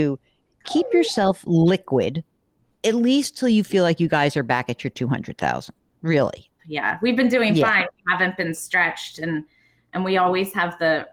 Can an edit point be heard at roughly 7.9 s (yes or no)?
no